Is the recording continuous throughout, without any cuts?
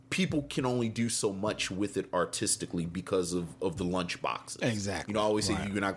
yes; 0 cuts

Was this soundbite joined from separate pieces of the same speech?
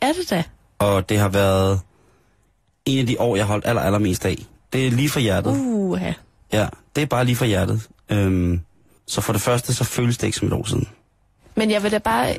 yes; 2 cuts; at 4.6 s, 9.0 s

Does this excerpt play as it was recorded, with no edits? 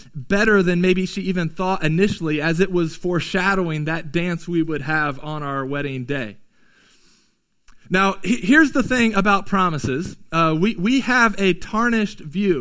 yes; 0 cuts

